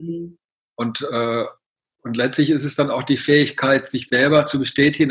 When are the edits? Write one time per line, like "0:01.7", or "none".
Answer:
none